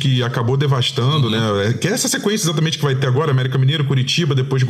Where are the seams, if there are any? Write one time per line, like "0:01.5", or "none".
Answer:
none